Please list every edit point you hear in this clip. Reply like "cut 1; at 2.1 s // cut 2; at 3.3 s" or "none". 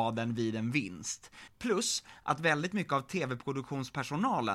cut 1; at 1.5 s